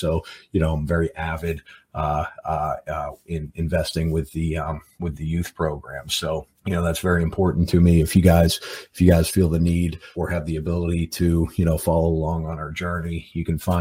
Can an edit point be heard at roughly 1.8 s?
no; 2 cuts; at 6.6 s, 10.1 s

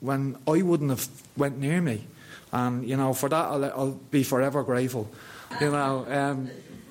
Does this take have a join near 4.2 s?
no; 2 cuts; at 2.4 s, 5.5 s

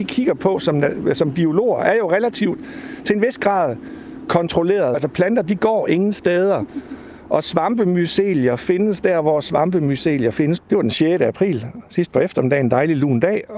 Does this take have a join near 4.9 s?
yes; 2 cuts; at 4.9 s, 10.6 s

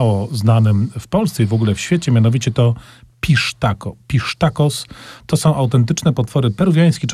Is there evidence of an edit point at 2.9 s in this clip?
no; 0 cuts

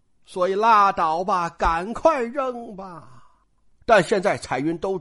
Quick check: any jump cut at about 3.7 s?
yes; 1 cut; at 3.7 s

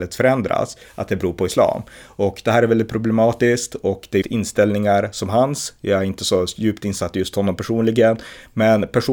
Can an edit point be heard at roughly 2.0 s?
no; 1 cut; at 4.2 s

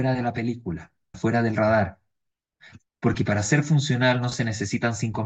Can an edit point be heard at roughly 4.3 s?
no; 2 cuts; at 1.1 s, 2.9 s

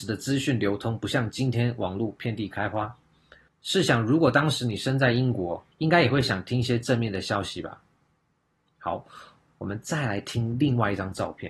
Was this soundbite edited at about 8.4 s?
no; 2 cuts; at 3.5 s, 5.7 s

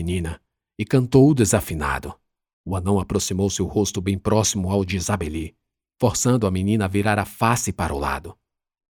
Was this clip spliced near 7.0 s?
no; 1 cut; at 2.5 s

